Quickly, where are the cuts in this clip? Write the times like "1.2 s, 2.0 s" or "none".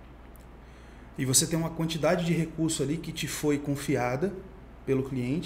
none